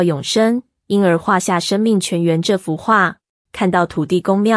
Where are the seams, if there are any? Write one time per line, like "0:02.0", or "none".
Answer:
0:03.5